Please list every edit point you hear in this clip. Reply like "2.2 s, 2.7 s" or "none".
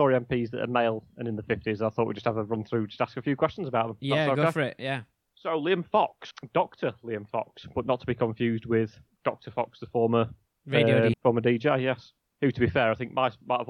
11.1 s